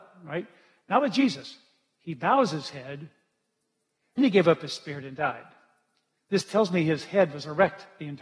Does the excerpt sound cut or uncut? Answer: cut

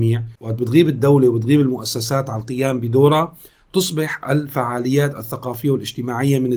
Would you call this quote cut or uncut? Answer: uncut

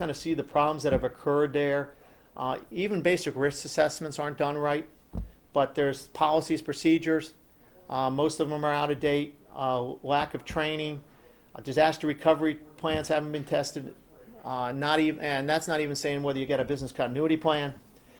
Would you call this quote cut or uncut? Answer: uncut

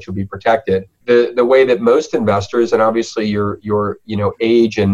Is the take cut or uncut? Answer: cut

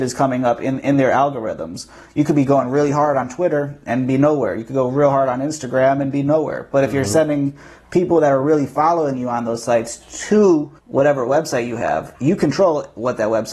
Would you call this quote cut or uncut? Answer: cut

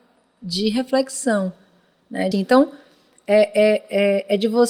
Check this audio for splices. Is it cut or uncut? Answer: cut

